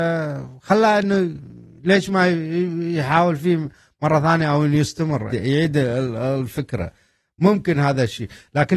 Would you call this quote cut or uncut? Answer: cut